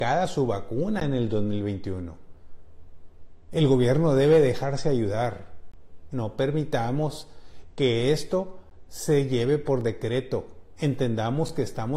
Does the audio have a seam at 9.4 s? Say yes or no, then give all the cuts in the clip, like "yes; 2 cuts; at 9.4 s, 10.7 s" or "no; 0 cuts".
no; 3 cuts; at 3.5 s, 6.1 s, 10.8 s